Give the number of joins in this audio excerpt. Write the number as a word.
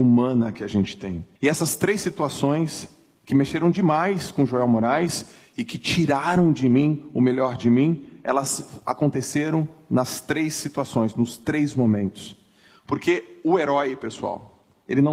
one